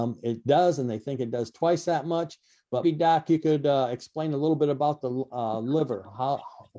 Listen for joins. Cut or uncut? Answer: cut